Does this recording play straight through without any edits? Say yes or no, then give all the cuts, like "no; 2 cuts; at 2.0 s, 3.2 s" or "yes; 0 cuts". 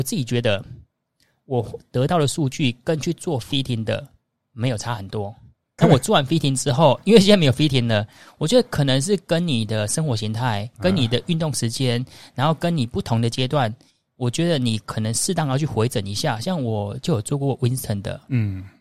no; 1 cut; at 5.8 s